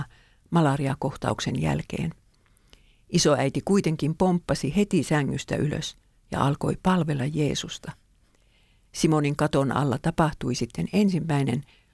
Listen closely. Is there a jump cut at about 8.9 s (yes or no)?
yes